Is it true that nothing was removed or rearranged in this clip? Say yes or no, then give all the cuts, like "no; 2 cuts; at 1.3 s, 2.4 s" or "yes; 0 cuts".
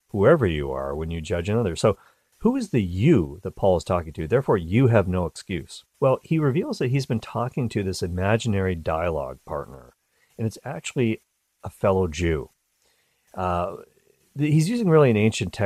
no; 1 cut; at 5.9 s